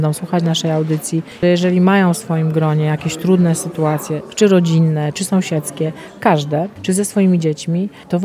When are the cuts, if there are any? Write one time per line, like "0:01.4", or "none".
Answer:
0:01.4
0:05.1

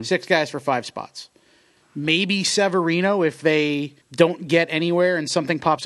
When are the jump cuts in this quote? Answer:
0:01.8
0:04.0

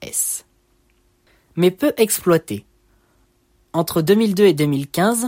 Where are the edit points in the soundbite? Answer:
0:03.7

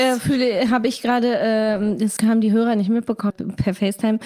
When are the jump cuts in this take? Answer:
0:02.2
0:03.3

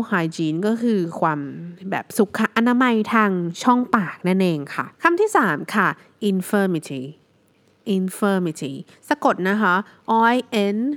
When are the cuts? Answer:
0:04.9

